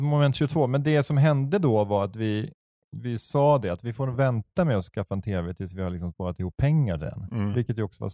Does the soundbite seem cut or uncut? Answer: uncut